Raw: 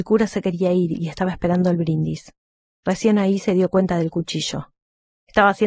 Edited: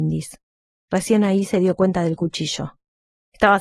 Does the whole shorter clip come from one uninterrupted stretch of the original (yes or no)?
yes